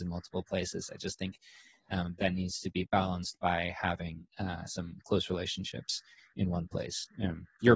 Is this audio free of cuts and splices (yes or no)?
yes